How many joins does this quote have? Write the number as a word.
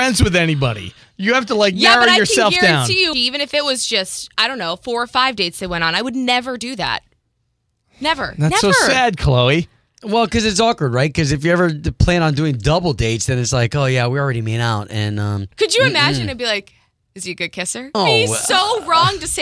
three